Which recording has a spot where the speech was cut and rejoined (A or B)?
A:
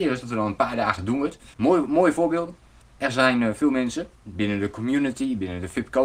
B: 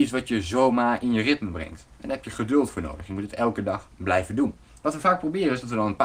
A